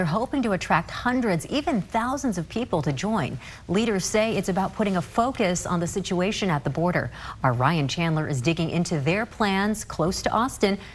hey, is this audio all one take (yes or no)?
yes